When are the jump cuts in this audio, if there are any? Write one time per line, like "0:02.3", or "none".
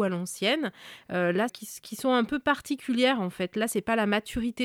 0:01.5